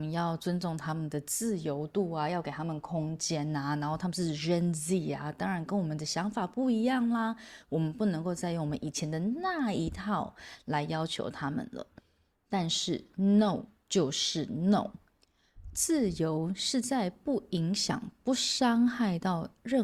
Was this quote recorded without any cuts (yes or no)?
yes